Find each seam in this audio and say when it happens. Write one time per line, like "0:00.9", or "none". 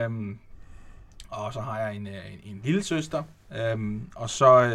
none